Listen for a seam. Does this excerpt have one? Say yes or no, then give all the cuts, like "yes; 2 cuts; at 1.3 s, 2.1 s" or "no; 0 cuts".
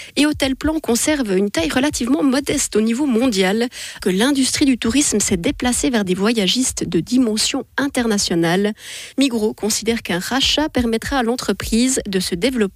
yes; 1 cut; at 4.0 s